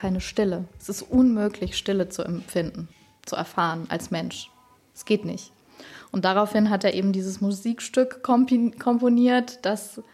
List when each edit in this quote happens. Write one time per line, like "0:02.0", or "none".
none